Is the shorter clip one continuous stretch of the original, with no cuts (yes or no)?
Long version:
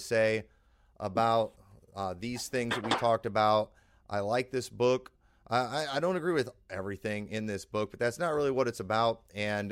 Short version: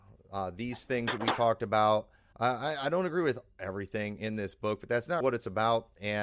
no